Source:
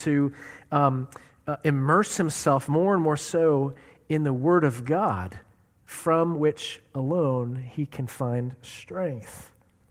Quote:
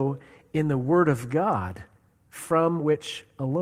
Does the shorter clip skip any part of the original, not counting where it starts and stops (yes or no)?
no